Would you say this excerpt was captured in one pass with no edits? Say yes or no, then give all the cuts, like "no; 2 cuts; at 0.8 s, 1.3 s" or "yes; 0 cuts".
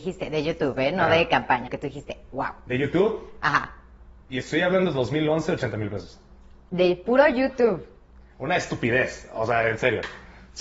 no; 1 cut; at 1.7 s